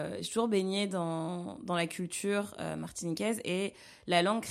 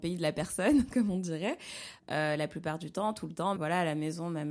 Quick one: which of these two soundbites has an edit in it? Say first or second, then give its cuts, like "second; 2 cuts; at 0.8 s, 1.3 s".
second; 2 cuts; at 2.0 s, 3.6 s